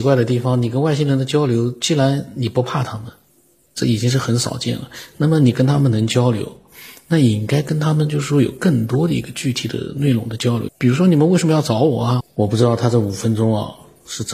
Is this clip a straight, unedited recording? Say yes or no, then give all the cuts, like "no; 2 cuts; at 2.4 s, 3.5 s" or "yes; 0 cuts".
no; 2 cuts; at 10.7 s, 12.2 s